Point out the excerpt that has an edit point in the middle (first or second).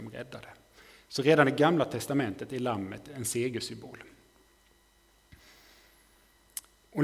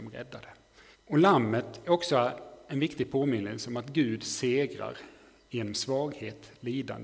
second